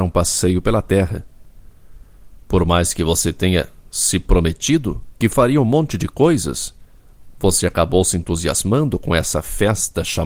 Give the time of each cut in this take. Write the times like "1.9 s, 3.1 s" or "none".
5.1 s, 7.3 s